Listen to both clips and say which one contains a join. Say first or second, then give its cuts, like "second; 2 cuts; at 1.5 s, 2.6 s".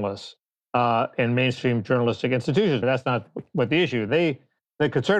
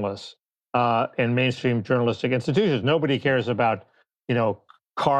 first; 2 cuts; at 2.8 s, 4.1 s